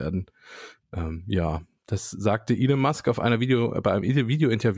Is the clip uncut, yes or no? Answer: yes